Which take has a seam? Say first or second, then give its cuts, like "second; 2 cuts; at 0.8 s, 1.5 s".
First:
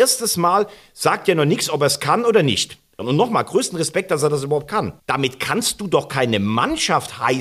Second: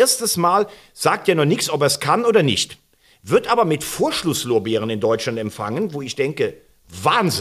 first; 2 cuts; at 3.0 s, 5.0 s